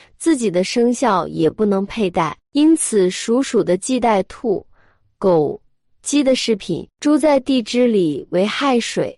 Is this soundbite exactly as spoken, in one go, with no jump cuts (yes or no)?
no